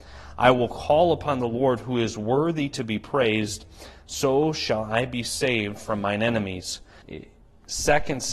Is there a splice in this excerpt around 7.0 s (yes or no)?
yes